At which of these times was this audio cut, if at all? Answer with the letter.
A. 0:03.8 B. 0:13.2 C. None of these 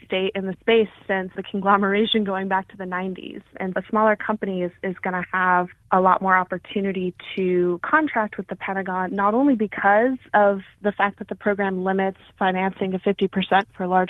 A